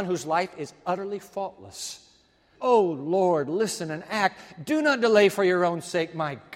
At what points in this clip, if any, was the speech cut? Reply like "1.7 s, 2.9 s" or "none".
2.5 s